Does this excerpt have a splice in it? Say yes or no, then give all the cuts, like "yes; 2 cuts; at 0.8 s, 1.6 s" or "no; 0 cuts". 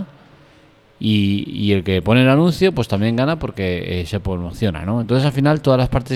no; 0 cuts